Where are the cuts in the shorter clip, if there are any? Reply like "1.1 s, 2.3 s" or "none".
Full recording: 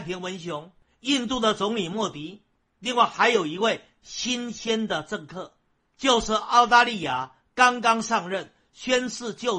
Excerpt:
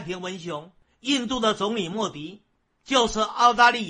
2.7 s